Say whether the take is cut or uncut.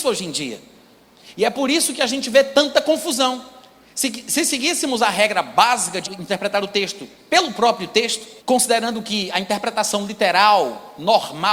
cut